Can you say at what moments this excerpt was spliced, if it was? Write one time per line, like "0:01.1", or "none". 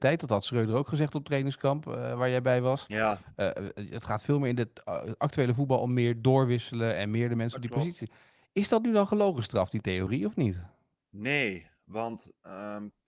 none